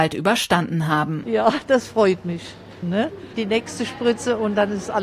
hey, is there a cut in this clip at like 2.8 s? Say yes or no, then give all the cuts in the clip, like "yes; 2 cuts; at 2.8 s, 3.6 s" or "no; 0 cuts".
yes; 2 cuts; at 1.2 s, 2.8 s